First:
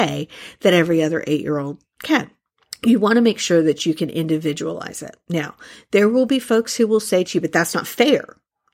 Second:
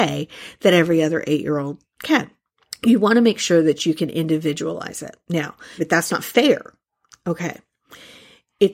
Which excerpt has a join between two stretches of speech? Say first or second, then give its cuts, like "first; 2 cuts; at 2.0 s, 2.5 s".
second; 1 cut; at 5.8 s